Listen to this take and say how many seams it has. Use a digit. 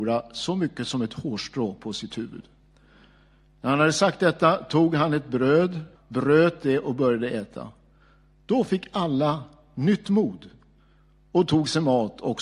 1